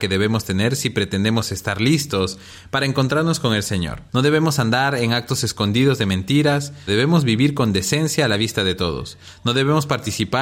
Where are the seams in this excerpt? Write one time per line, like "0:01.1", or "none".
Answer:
0:04.1
0:06.9